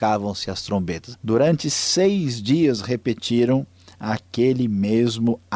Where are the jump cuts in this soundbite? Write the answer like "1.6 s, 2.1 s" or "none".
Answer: 1.1 s